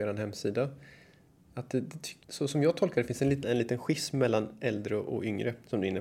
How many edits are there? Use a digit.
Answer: 2